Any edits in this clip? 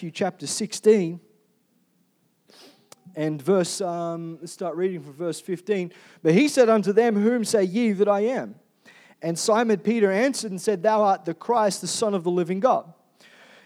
no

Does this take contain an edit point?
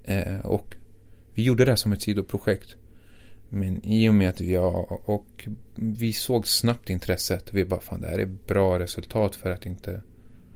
no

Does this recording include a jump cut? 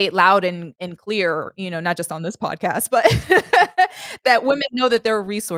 no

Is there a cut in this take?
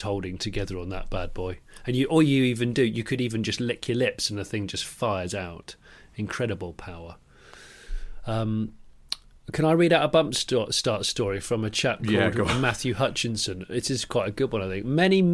no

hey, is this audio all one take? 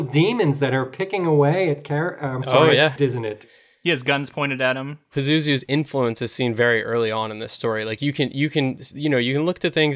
no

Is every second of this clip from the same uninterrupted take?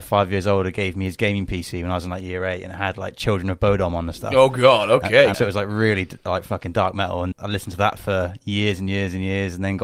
no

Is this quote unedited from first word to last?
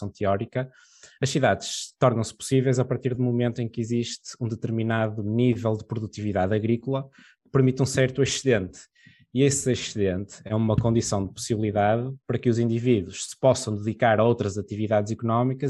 yes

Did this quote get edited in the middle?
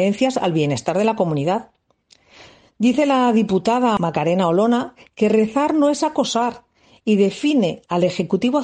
no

